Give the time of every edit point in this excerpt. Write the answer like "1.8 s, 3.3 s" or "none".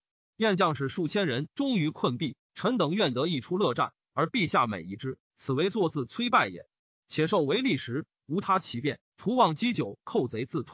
1.5 s